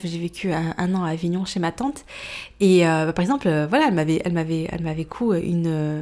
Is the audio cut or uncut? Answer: uncut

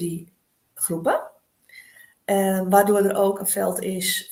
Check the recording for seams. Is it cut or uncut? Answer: uncut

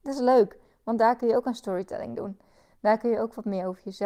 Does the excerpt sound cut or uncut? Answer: uncut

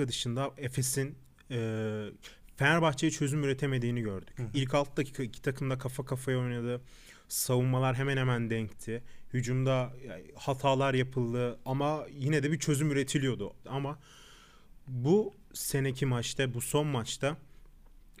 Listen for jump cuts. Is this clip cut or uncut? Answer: cut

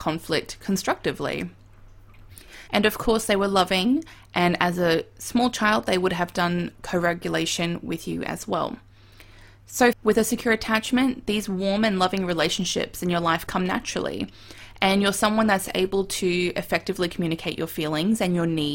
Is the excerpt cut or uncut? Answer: cut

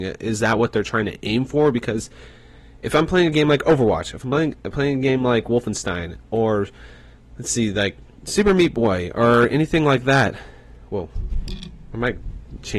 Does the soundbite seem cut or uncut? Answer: uncut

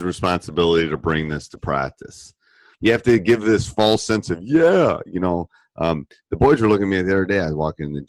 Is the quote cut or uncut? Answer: cut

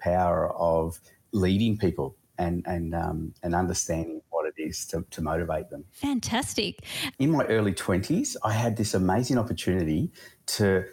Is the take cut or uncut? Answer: cut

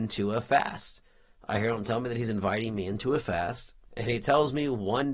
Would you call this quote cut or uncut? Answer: cut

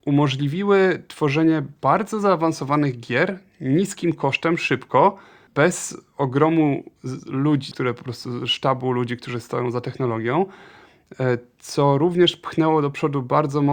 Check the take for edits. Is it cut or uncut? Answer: cut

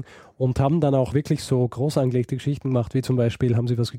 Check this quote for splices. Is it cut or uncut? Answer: cut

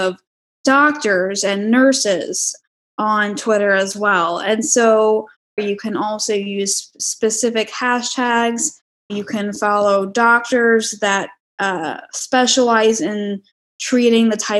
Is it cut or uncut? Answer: cut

